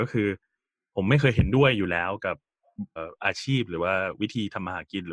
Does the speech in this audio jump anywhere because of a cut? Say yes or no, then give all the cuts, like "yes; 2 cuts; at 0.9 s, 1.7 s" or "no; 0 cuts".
yes; 1 cut; at 3.0 s